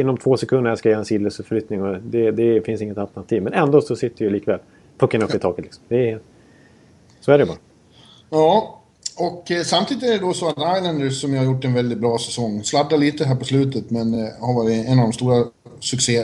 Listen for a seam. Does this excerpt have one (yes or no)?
no